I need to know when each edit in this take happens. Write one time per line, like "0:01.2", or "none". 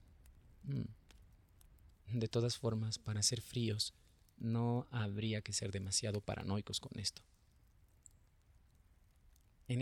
0:01.9